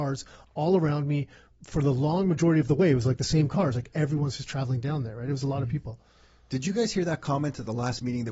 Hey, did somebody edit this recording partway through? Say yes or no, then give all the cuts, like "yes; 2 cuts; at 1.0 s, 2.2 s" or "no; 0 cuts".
no; 0 cuts